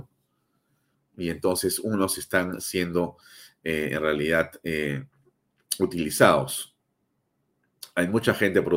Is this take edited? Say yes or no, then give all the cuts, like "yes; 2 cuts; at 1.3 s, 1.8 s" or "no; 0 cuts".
no; 0 cuts